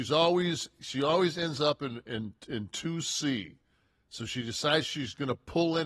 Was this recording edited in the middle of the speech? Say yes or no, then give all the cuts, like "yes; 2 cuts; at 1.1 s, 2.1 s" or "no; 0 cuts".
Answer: no; 0 cuts